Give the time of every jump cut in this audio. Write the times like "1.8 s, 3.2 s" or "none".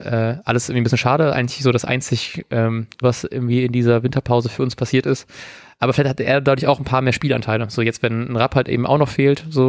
3.0 s